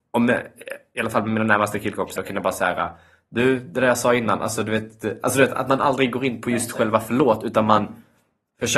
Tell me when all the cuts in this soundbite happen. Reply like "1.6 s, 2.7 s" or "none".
2.2 s

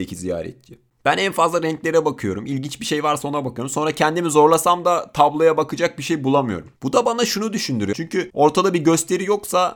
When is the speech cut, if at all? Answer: 6.8 s, 7.9 s

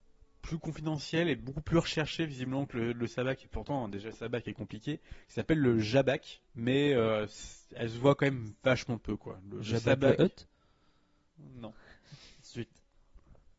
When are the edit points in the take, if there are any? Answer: 6.5 s

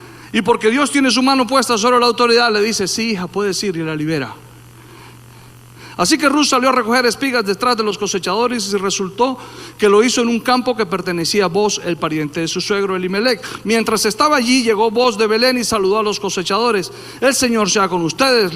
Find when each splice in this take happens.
none

